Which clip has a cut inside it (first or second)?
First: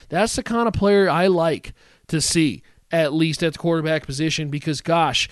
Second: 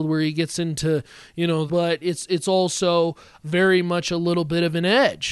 second